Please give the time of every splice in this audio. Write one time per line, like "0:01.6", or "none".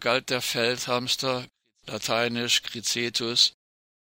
0:02.6